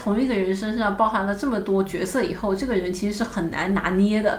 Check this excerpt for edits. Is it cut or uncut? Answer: uncut